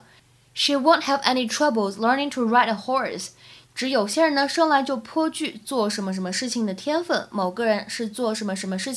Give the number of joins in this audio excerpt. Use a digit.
2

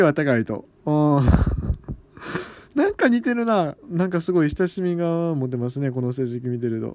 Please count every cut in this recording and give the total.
0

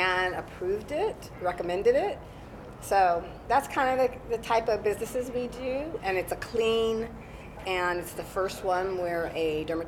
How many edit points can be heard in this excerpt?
2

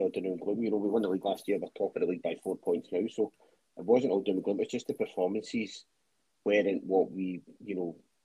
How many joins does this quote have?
0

